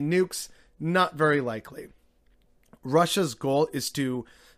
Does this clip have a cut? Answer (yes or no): no